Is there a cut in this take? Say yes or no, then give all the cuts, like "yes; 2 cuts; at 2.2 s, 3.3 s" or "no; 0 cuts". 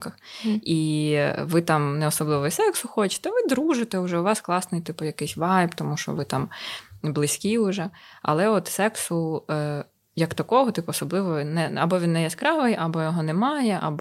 no; 0 cuts